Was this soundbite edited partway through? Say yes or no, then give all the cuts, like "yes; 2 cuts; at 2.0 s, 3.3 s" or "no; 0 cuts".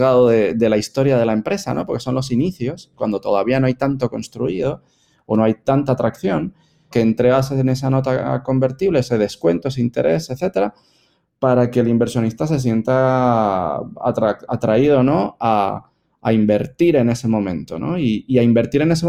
yes; 1 cut; at 6.9 s